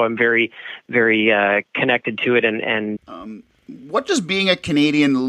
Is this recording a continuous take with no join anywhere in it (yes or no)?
no